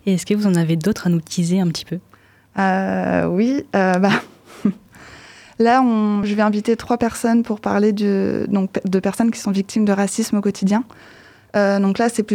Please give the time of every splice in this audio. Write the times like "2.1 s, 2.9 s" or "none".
none

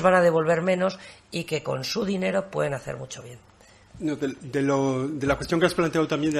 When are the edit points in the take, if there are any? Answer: 3.9 s

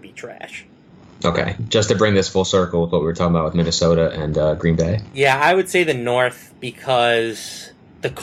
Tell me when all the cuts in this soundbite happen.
1.6 s

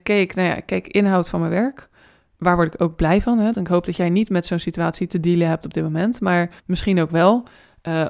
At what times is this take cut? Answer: 3.5 s, 6.6 s

